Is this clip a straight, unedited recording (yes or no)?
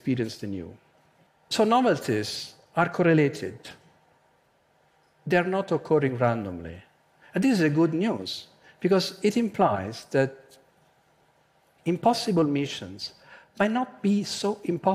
yes